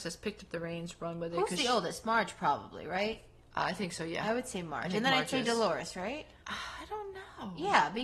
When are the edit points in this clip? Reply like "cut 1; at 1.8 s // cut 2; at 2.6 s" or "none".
none